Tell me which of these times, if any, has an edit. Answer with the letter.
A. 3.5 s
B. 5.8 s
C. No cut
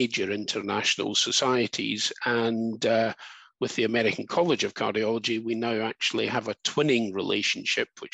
C